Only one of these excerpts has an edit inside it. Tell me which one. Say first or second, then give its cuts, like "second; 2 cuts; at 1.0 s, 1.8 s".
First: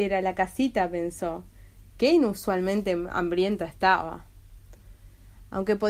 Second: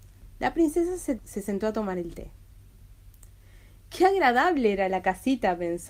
second; 1 cut; at 1.2 s